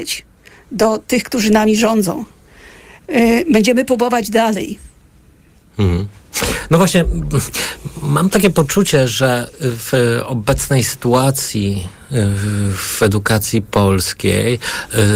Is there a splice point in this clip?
no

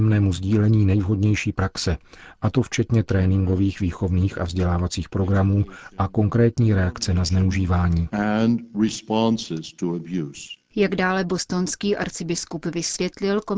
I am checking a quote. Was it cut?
yes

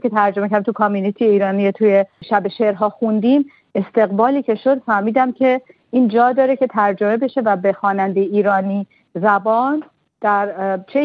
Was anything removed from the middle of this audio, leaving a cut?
no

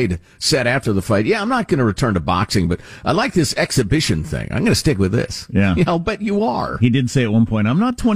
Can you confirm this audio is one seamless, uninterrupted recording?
yes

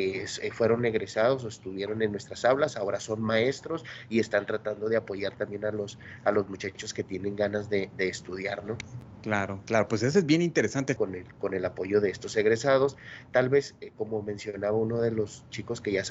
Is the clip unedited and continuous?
no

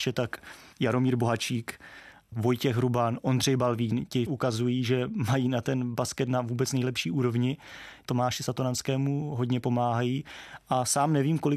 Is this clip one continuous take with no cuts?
yes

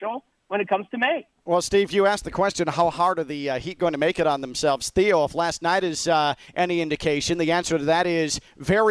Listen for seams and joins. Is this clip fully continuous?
yes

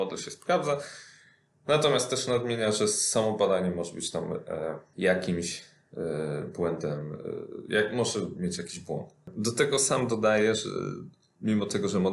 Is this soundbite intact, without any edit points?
yes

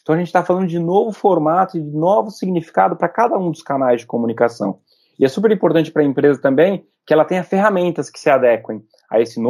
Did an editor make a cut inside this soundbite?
no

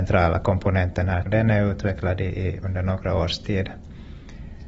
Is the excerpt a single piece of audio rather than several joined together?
no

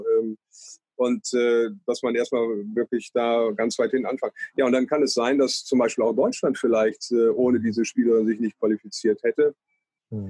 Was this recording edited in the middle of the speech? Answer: no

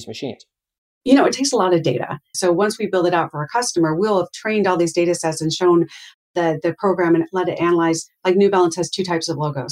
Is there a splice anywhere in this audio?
yes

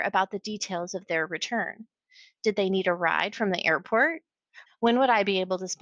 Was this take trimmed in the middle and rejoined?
yes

